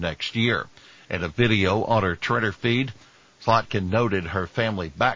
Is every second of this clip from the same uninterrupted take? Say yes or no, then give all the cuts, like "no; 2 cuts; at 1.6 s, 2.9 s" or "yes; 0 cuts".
yes; 0 cuts